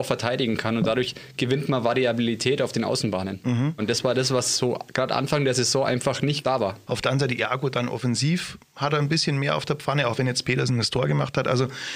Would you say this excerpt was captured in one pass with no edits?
no; 2 cuts; at 3.8 s, 6.9 s

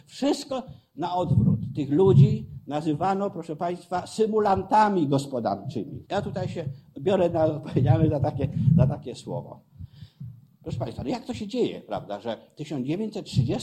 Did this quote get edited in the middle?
yes; 1 cut; at 6.0 s

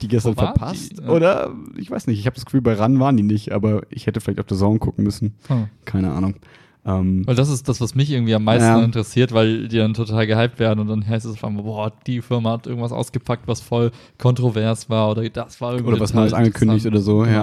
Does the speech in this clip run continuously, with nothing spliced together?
yes; 0 cuts

